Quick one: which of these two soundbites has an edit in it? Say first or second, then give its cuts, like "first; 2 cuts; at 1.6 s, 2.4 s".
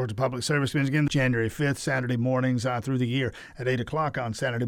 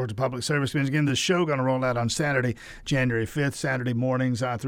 first; 1 cut; at 1.1 s